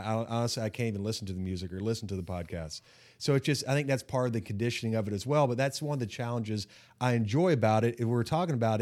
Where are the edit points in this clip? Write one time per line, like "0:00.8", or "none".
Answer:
none